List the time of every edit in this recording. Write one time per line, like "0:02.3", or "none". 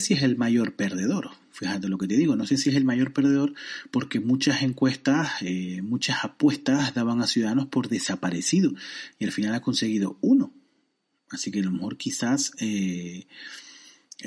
none